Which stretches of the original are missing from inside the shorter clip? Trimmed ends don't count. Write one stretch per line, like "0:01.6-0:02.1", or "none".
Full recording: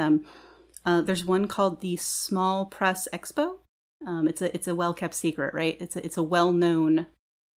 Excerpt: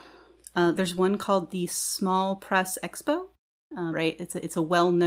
0:04.2-0:05.5